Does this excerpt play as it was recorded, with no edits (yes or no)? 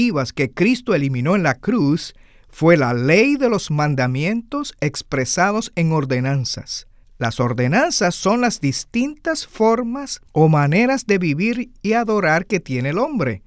no